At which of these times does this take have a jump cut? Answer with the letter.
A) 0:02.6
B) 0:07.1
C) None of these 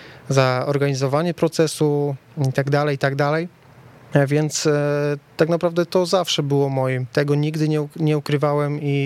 B